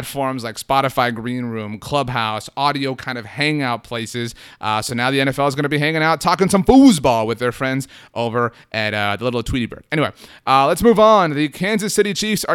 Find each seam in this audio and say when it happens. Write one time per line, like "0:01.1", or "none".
none